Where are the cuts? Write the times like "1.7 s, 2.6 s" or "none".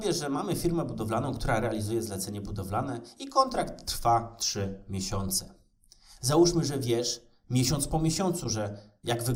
6.2 s